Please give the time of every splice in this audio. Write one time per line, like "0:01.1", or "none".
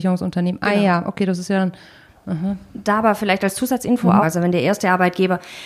0:02.1
0:04.2